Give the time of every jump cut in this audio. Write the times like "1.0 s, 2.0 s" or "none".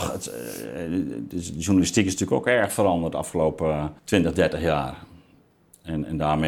4.0 s